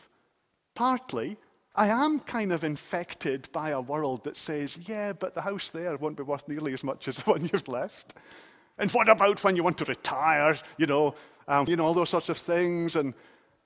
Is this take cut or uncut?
cut